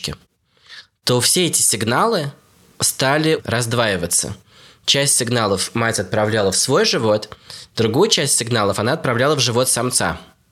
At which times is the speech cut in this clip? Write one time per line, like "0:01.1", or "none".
none